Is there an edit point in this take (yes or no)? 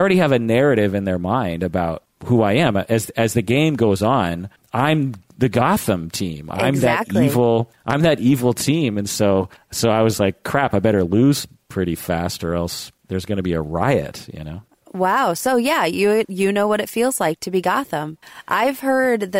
no